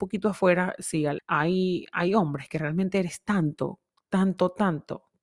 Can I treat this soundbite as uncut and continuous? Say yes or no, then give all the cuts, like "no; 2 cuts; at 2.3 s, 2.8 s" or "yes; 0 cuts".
no; 1 cut; at 1.2 s